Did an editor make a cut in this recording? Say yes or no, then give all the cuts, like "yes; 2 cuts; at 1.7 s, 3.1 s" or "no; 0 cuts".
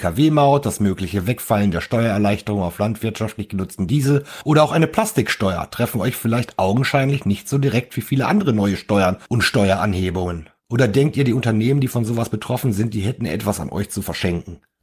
yes; 1 cut; at 10.6 s